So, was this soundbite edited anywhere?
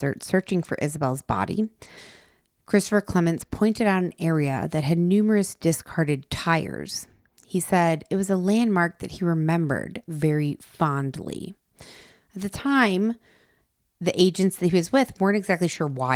no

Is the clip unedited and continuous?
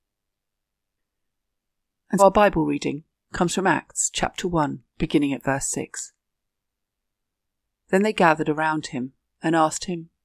no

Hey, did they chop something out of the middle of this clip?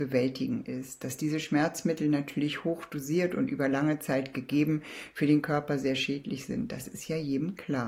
no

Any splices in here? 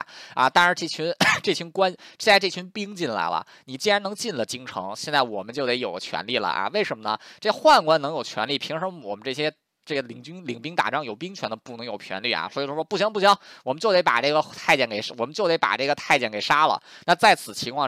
no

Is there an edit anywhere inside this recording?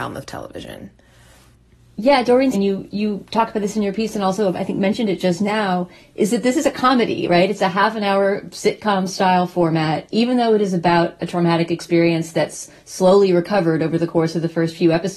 yes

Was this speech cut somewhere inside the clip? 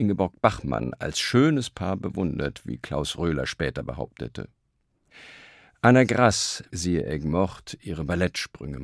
yes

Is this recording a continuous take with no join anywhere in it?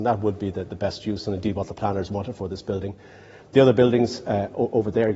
yes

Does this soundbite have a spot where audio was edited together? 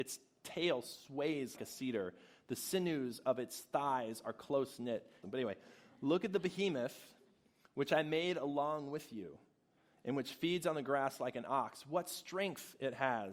yes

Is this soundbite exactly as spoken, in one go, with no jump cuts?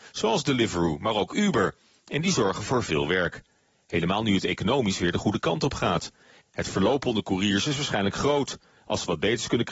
no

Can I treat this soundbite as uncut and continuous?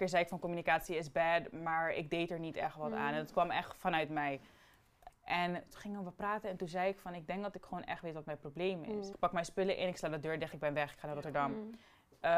no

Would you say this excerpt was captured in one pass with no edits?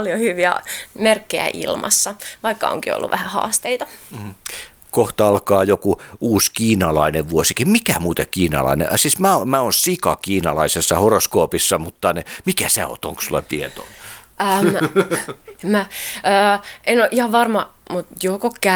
yes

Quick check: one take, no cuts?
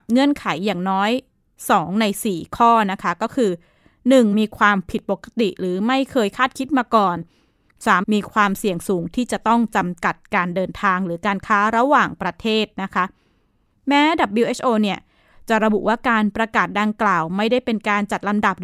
no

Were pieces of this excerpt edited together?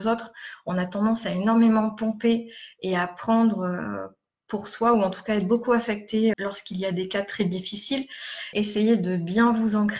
yes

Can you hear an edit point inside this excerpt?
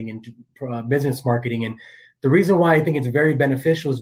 no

